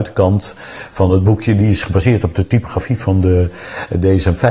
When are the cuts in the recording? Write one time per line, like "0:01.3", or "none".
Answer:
none